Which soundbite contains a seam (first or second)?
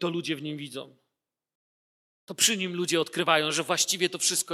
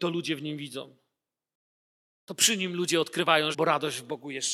second